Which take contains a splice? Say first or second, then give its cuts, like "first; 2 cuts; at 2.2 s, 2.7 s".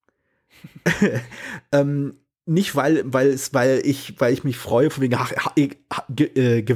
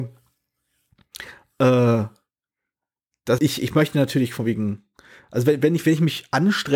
second; 1 cut; at 3.4 s